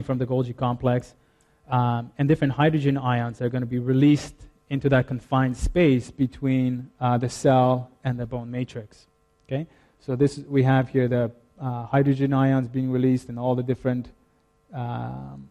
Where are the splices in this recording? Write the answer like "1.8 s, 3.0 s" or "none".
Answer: none